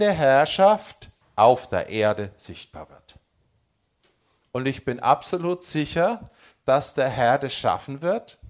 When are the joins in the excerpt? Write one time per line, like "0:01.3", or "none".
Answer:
0:01.2